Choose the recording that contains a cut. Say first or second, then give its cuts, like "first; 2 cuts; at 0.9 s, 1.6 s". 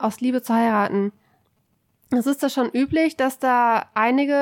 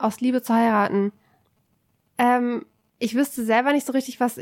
second; 1 cut; at 2.0 s